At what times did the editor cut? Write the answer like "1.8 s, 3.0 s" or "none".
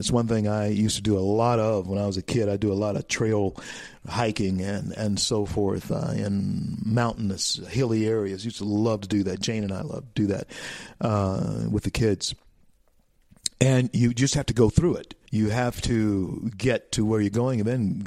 15.3 s